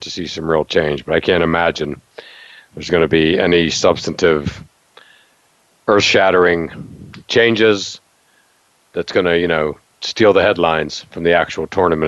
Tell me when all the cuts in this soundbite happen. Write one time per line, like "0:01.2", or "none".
none